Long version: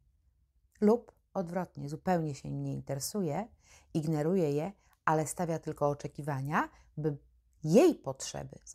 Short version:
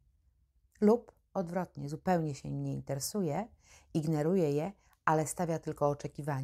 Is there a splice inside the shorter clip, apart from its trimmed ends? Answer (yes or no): no